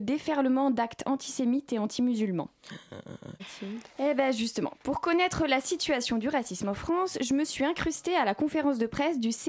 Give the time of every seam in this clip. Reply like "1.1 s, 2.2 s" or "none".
3.4 s